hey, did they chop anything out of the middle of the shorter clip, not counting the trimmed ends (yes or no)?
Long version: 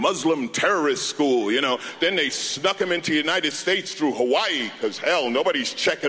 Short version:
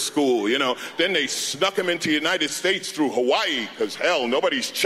no